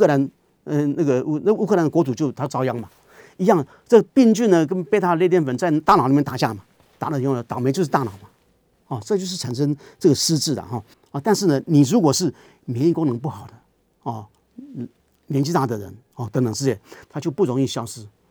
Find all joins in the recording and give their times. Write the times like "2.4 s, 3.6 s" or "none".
10.9 s, 17.0 s